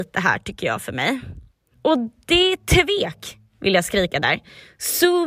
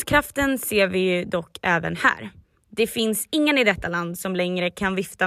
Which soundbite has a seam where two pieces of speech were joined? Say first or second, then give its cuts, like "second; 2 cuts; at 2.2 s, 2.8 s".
first; 1 cut; at 1.7 s